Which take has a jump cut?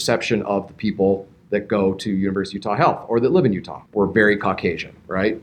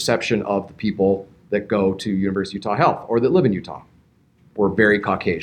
first; 1 cut; at 3.9 s

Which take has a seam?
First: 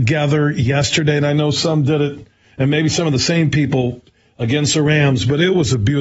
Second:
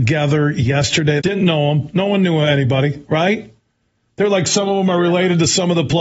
second; 1 cut; at 1.2 s

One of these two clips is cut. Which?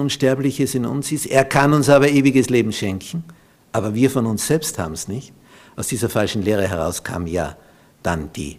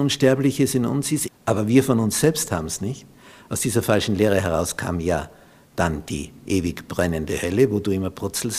second; 1 cut; at 1.3 s

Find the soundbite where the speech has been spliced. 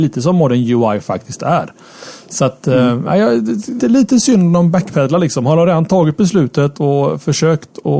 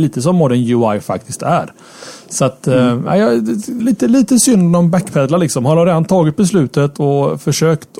first; 1 cut; at 3.8 s

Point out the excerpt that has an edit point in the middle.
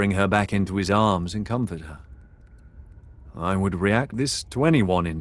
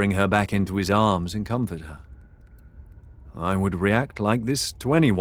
first; 1 cut; at 4.1 s

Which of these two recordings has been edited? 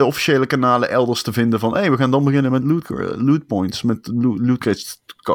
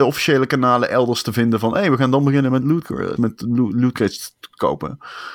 second; 1 cut; at 3.2 s

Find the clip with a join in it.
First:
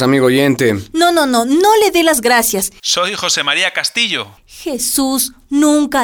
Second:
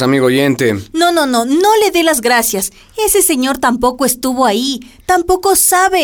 first; 2 cuts; at 2.8 s, 4.4 s

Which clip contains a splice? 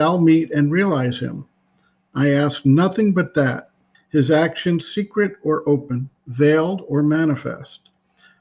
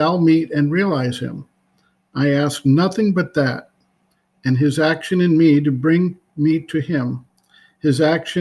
first; 2 cuts; at 3.9 s, 6.2 s

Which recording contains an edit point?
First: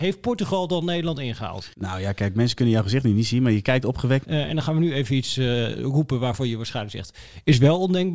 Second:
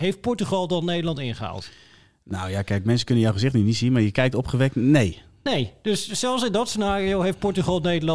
first; 2 cuts; at 1.7 s, 4.2 s

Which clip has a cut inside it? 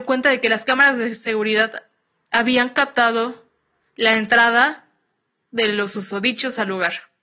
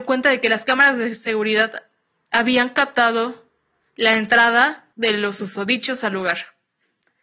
second; 1 cut; at 4.9 s

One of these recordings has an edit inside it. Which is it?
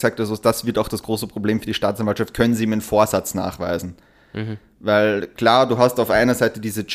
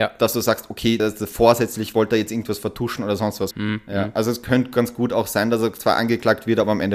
second; 2 cuts; at 1.0 s, 3.5 s

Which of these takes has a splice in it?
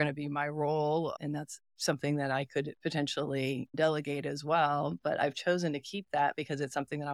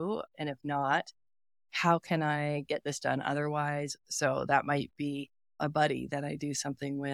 second; 1 cut; at 4.0 s

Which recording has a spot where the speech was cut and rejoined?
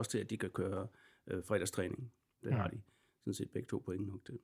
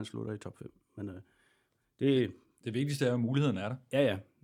first; 1 cut; at 2.4 s

